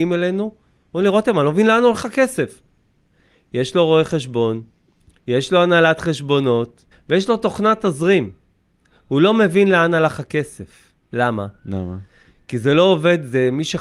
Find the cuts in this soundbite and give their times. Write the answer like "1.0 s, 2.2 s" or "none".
6.9 s, 11.0 s